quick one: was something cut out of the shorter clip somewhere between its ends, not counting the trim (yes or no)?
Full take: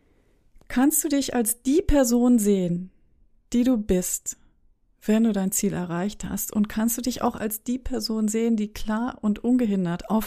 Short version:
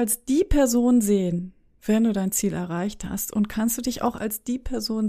yes